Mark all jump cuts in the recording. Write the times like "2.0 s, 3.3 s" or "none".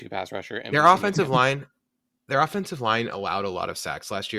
none